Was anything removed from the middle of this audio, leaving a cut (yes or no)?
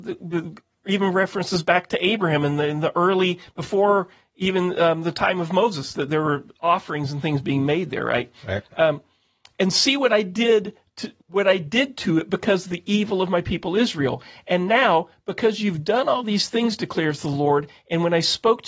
yes